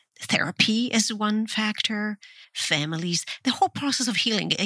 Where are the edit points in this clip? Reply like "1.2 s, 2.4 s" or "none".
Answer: 2.4 s